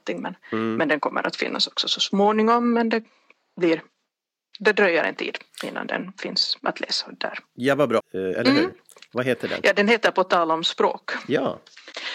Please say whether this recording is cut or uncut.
cut